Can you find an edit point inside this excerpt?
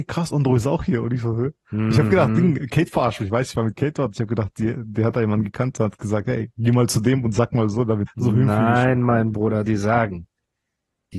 yes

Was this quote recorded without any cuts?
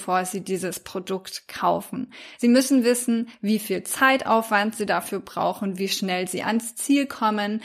yes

